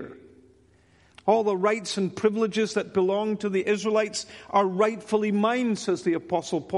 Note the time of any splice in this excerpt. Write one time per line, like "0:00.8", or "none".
0:01.1